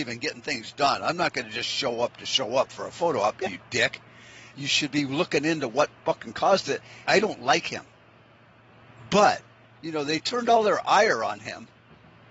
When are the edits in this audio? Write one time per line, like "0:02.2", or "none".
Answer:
0:03.5
0:04.5
0:07.0